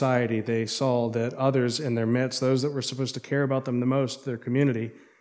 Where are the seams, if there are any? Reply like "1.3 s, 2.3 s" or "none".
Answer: none